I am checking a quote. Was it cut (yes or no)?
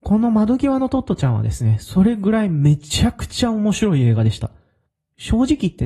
no